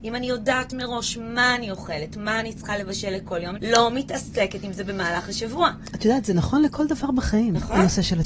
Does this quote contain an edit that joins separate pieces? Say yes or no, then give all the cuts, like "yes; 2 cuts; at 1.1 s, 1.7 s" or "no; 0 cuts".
yes; 1 cut; at 3.6 s